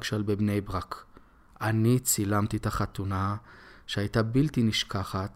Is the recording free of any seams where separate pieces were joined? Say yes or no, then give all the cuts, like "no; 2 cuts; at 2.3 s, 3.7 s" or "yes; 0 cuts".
yes; 0 cuts